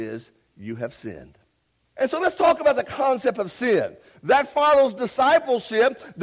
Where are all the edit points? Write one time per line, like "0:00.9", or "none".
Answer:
0:01.9
0:04.1